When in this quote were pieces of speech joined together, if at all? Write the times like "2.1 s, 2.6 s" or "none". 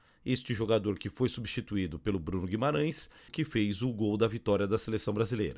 3.3 s